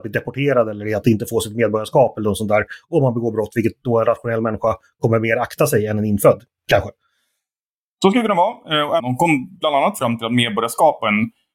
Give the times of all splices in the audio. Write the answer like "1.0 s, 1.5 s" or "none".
9.0 s